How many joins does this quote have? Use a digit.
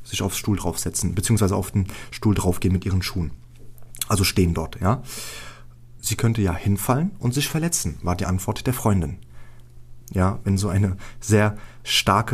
2